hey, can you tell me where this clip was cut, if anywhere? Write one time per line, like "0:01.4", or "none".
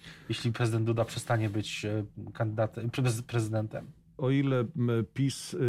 0:04.2